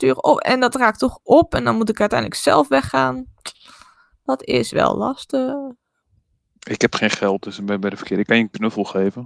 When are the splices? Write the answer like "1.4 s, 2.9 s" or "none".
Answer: none